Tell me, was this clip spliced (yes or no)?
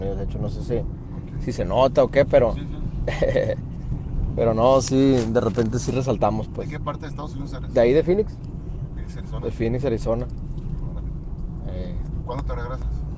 no